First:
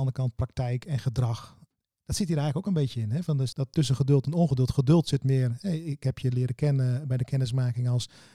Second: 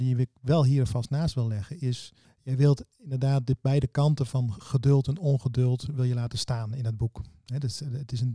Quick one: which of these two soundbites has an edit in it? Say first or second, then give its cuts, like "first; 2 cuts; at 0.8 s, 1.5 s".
first; 1 cut; at 3.5 s